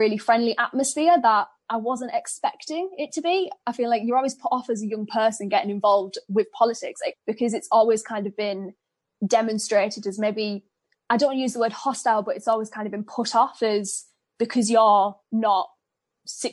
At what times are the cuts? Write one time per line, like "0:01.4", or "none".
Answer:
0:07.1
0:15.2